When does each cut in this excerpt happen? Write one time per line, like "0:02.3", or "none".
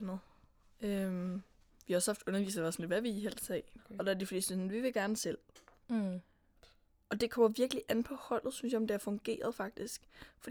0:03.8